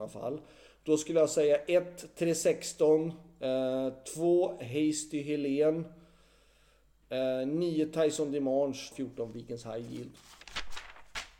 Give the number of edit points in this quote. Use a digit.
2